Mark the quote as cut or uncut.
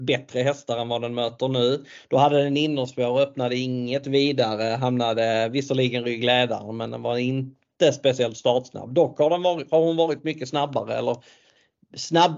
uncut